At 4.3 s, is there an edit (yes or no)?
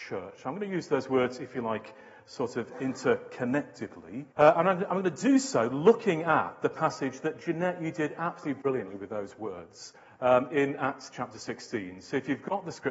yes